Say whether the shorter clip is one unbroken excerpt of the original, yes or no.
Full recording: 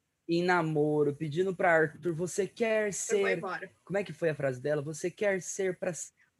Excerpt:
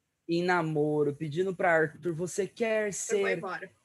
yes